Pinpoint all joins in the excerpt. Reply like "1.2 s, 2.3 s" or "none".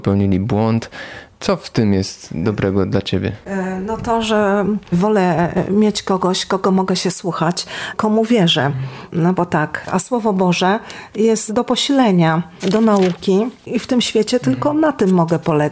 7.9 s, 9.8 s